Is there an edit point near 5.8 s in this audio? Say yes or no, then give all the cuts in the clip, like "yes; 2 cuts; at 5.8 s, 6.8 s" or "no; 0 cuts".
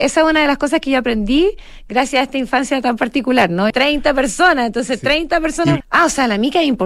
yes; 2 cuts; at 3.7 s, 5.8 s